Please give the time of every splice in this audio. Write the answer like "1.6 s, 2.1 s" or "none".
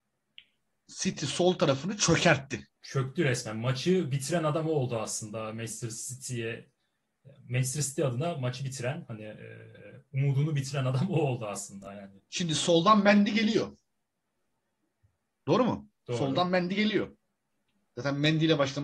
2.7 s